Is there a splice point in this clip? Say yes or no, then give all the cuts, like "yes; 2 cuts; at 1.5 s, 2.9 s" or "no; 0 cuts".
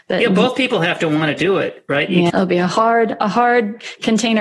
yes; 1 cut; at 2.3 s